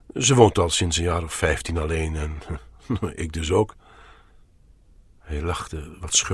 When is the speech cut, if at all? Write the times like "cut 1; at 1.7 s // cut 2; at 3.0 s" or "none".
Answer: none